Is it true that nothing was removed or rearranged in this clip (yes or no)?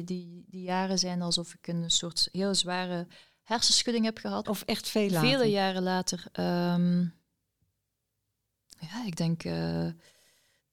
no